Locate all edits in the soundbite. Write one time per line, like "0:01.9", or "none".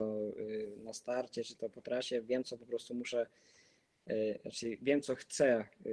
none